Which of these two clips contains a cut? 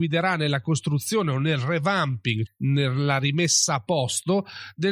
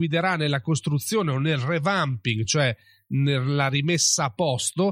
first; 1 cut; at 2.5 s

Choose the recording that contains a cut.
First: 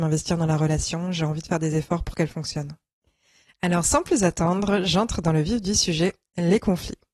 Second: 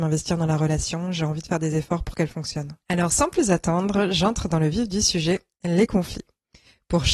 second; 1 cut; at 2.8 s

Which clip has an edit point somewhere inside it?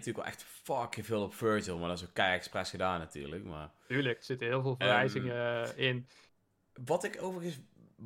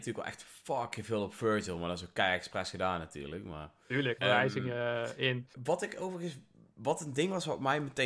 second; 2 cuts; at 4.2 s, 5.5 s

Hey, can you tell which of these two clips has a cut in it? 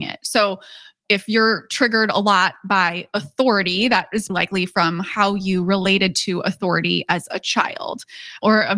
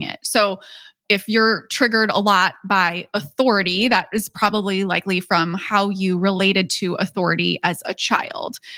first; 1 cut; at 4.3 s

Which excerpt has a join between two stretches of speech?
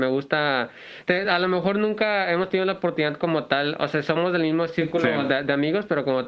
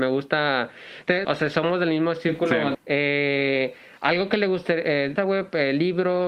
second; 3 cuts; at 1.2 s, 2.7 s, 5.2 s

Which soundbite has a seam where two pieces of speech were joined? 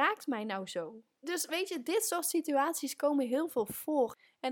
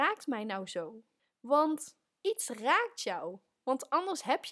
first; 1 cut; at 1.1 s

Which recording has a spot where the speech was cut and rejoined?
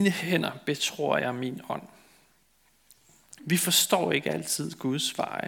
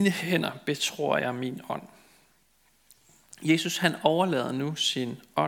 first; 1 cut; at 3.4 s

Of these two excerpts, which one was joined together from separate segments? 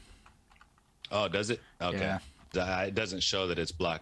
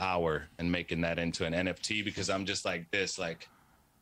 first; 1 cut; at 2.5 s

